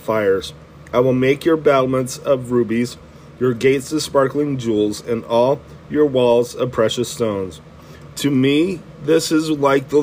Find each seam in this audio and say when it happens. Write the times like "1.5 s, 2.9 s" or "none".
8.1 s